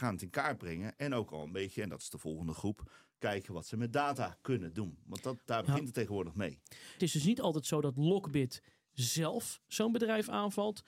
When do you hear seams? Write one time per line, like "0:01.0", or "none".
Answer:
0:07.0